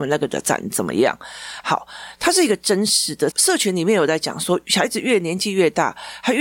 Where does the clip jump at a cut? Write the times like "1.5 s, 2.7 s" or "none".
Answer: 3.3 s